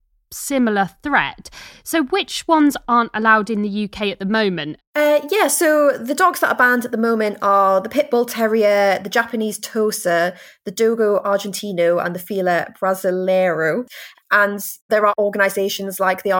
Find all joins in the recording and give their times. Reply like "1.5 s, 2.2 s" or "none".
4.8 s, 14.1 s